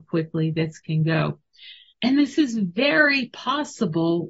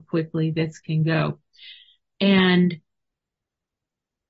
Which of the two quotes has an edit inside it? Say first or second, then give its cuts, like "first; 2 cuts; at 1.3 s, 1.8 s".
first; 1 cut; at 1.9 s